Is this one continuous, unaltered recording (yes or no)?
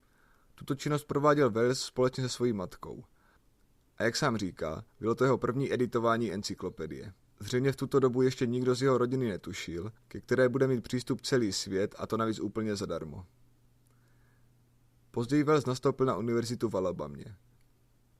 no